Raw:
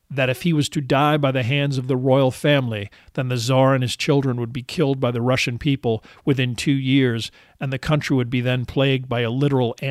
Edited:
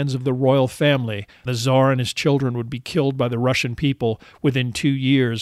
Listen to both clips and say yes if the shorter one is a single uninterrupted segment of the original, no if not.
no